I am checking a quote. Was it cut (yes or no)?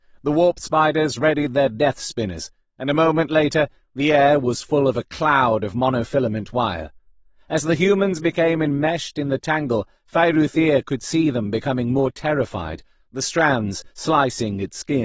no